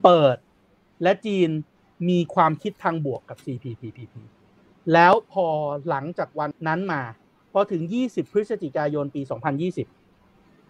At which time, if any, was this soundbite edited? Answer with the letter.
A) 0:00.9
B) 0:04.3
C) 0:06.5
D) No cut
C